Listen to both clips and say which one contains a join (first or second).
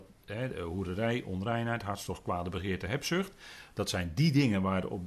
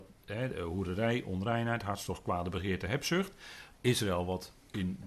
second